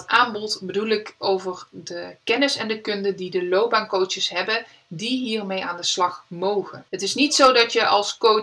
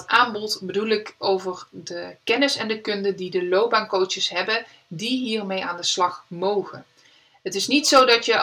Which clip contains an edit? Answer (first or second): first